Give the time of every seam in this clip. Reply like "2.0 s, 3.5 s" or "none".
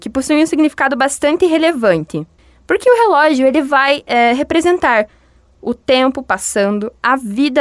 none